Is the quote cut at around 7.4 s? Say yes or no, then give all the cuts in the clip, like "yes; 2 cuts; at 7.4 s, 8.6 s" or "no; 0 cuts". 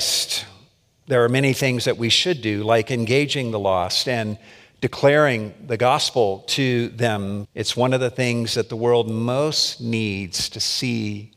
yes; 1 cut; at 7.4 s